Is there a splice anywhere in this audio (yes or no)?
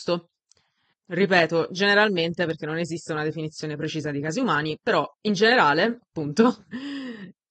yes